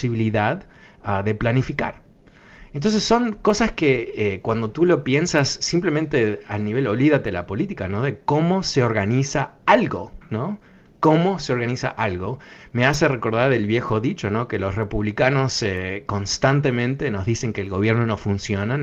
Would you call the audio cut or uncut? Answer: uncut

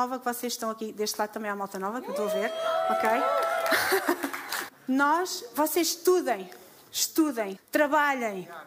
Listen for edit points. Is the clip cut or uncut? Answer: cut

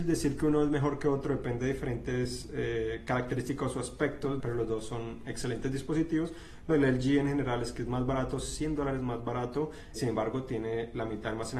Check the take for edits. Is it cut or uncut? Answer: cut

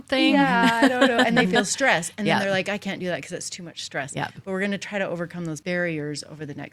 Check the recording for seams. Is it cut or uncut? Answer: uncut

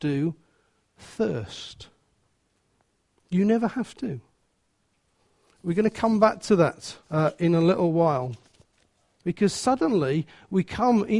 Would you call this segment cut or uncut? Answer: cut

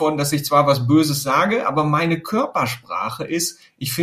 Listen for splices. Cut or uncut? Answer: uncut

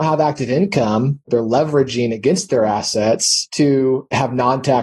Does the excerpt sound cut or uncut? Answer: cut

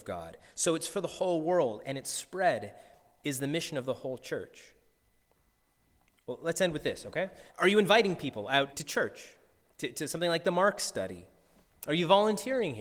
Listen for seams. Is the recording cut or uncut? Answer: cut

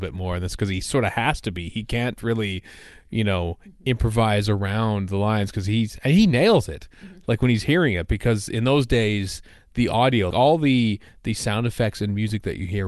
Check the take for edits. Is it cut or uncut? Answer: cut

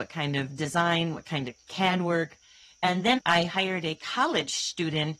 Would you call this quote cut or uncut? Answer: cut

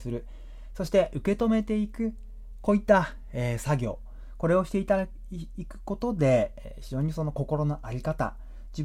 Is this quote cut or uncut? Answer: uncut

